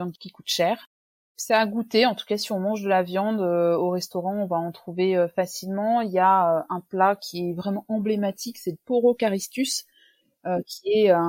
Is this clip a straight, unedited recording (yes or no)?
yes